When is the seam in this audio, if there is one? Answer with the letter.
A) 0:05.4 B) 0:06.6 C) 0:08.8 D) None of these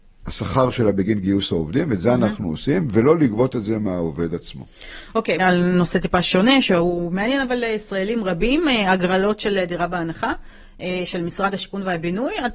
A